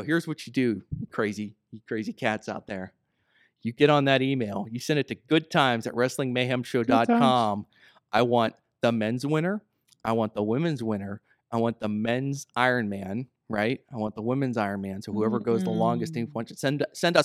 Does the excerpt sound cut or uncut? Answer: uncut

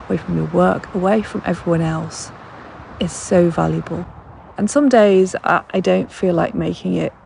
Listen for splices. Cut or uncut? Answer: cut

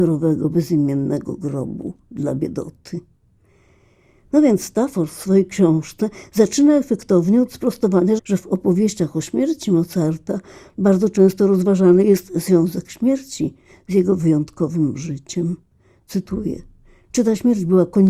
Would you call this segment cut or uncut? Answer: cut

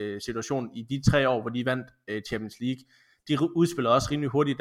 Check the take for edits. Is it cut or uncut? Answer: uncut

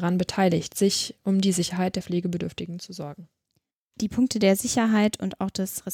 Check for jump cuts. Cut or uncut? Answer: uncut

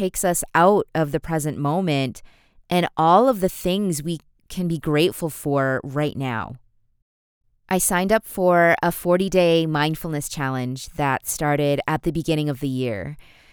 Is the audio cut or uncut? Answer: uncut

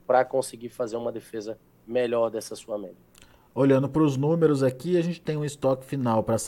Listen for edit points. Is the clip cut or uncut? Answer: uncut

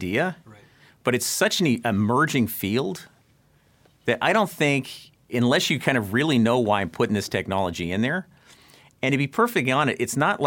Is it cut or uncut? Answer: uncut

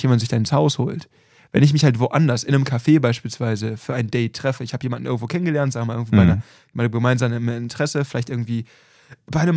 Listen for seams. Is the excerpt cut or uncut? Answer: uncut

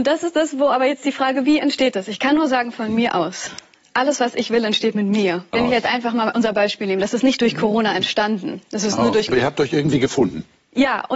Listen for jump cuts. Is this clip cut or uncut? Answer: cut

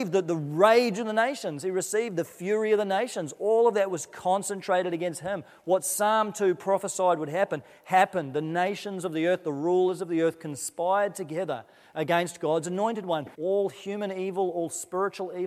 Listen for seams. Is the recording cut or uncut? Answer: cut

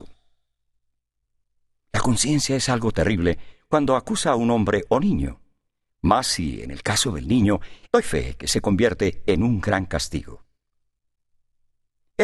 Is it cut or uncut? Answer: cut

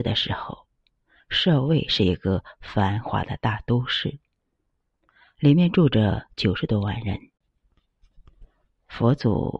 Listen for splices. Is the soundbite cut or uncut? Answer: uncut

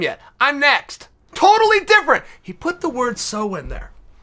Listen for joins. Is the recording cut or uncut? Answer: cut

